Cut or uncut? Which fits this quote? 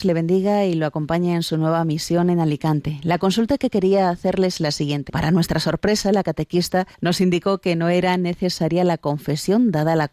cut